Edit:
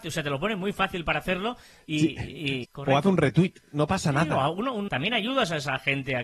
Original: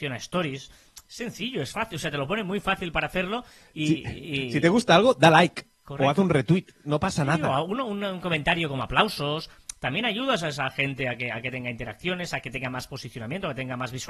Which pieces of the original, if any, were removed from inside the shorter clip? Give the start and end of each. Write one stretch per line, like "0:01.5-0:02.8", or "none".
0:04.5-0:05.8
0:08.0-0:09.8